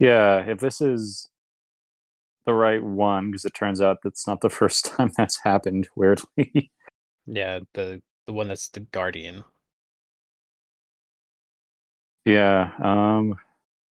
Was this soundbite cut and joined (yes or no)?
no